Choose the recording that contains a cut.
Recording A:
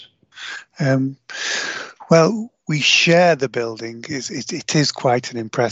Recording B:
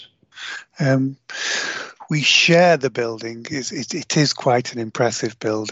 B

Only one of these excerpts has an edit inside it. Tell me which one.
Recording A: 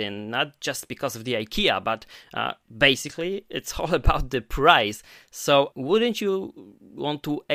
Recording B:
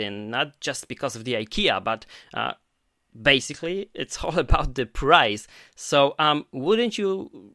A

